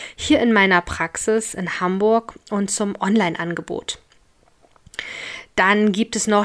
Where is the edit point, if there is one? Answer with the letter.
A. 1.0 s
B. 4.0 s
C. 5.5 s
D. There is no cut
D